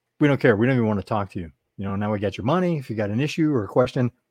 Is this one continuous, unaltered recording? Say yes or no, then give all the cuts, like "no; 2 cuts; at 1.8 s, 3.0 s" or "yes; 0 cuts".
yes; 0 cuts